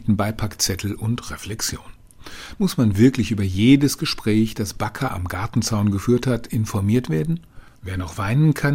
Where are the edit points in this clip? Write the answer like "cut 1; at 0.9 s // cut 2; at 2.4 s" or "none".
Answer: cut 1; at 2.6 s // cut 2; at 7.8 s